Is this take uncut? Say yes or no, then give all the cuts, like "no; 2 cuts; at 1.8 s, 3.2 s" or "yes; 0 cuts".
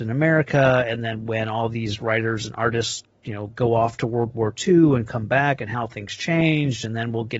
yes; 0 cuts